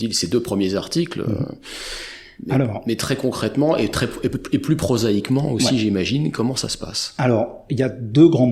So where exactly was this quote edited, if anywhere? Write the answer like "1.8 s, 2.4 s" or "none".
none